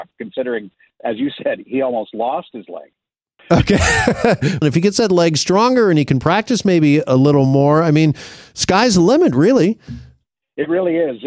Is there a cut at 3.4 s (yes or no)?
yes